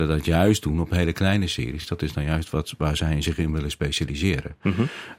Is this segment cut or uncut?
uncut